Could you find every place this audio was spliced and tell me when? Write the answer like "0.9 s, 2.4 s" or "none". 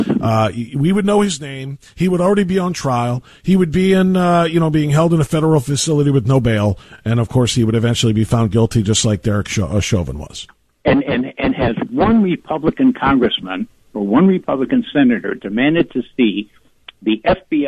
none